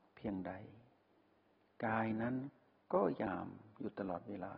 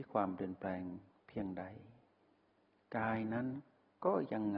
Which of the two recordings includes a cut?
first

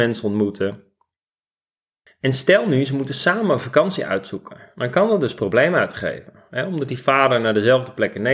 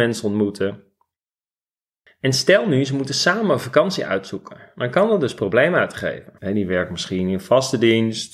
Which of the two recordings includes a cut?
second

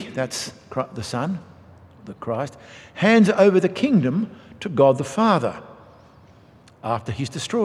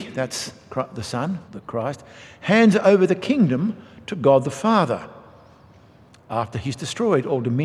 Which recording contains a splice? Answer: second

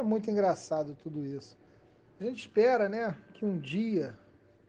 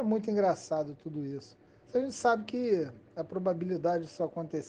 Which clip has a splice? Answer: second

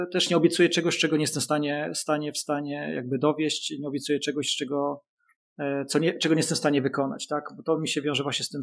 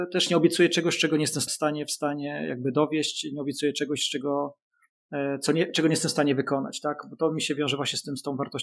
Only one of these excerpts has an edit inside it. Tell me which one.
second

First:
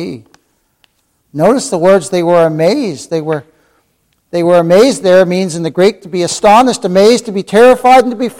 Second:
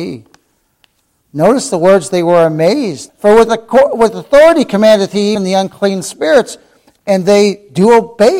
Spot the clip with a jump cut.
second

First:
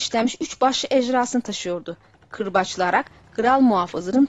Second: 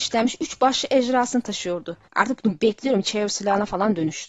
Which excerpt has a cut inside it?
second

